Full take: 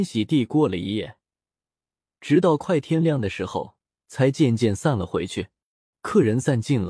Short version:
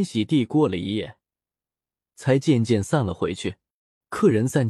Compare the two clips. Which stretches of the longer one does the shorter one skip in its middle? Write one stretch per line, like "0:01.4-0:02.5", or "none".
0:02.0-0:03.9